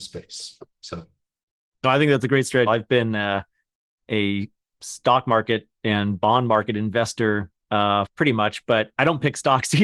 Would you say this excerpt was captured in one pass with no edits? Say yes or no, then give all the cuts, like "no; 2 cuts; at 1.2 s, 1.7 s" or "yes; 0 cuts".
no; 2 cuts; at 2.7 s, 8.1 s